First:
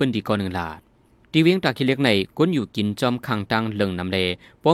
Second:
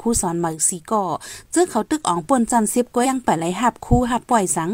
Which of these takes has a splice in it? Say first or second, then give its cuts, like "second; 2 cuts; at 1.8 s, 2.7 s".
second; 1 cut; at 3.0 s